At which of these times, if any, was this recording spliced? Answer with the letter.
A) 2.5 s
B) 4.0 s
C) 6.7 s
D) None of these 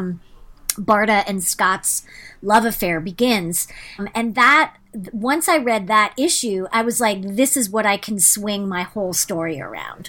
B